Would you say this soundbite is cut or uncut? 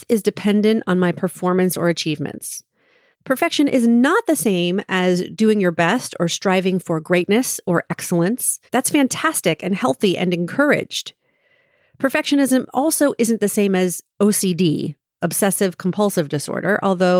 cut